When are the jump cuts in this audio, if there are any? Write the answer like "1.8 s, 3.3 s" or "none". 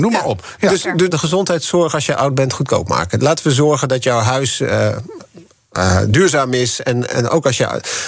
1.1 s